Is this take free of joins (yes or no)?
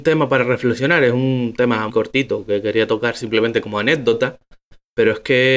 no